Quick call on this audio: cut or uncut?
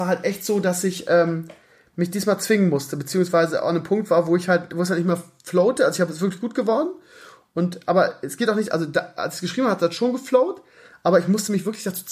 uncut